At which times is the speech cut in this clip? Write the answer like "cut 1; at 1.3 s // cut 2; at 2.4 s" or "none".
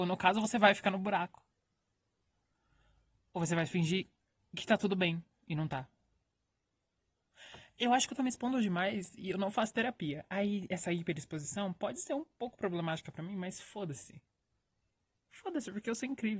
none